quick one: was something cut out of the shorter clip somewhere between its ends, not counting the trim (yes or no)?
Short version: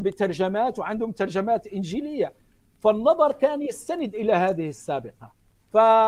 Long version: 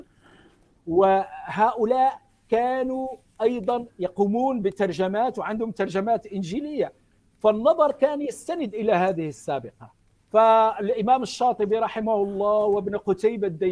no